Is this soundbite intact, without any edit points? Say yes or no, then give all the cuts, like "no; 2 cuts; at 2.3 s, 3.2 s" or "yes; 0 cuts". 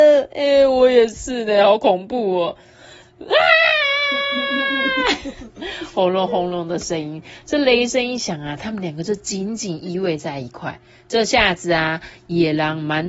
yes; 0 cuts